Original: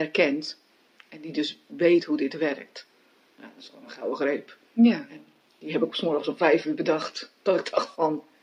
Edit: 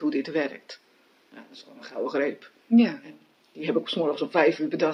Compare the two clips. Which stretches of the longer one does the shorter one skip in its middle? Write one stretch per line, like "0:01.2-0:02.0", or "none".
none